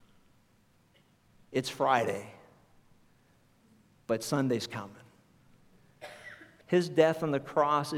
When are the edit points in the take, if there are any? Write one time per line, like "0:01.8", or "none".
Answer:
0:06.6